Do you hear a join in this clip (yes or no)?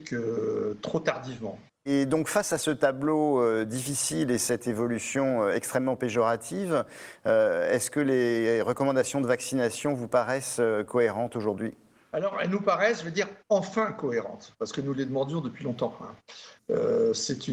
no